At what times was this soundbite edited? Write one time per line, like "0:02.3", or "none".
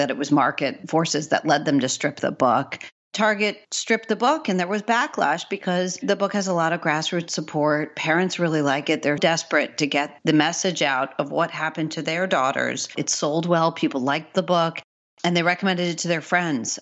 0:09.2
0:13.0

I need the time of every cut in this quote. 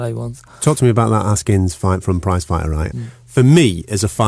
0:02.9

